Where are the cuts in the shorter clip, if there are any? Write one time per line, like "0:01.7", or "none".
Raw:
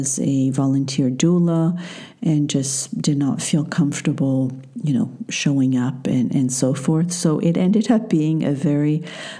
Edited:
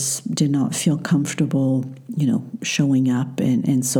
none